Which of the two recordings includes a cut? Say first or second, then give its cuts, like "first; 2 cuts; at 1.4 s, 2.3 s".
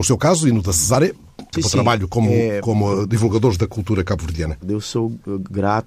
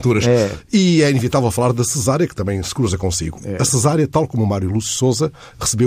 first; 2 cuts; at 1.5 s, 4.6 s